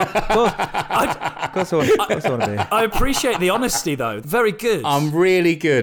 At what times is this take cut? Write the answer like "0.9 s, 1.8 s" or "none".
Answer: 4.2 s